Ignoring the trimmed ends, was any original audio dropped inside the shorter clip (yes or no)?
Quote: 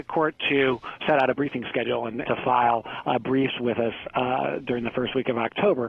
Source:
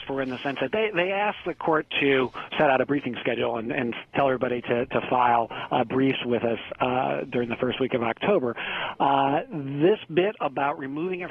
yes